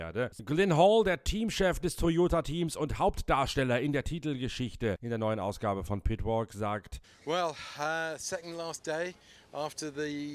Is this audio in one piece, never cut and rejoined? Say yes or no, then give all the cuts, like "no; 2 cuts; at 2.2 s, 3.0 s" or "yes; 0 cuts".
yes; 0 cuts